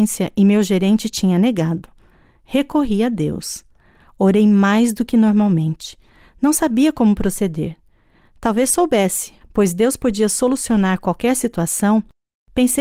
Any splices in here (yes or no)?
yes